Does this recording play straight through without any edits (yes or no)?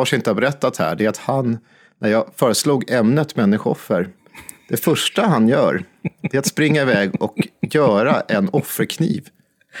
yes